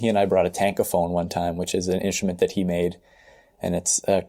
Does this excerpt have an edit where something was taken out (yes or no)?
no